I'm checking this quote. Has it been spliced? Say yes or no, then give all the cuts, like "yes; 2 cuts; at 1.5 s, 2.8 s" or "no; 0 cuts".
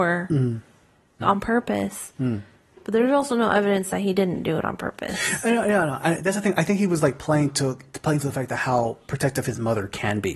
yes; 1 cut; at 1.2 s